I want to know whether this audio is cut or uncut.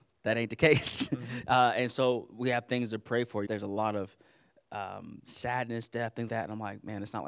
cut